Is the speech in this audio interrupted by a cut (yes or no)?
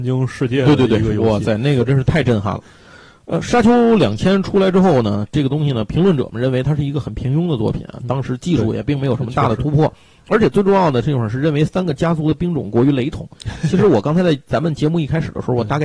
no